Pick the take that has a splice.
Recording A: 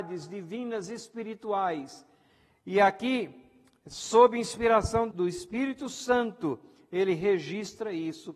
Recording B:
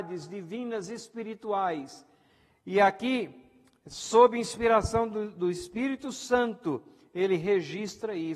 A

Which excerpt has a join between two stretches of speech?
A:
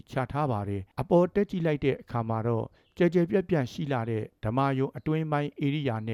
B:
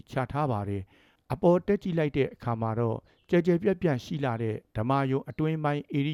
A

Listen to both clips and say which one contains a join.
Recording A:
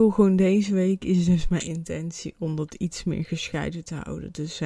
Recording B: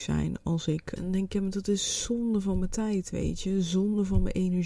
B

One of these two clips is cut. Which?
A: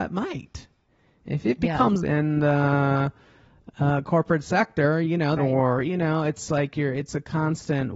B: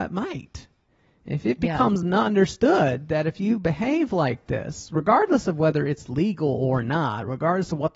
A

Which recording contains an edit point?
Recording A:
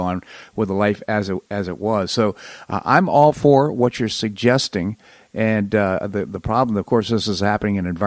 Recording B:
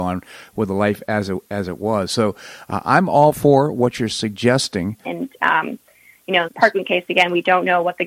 B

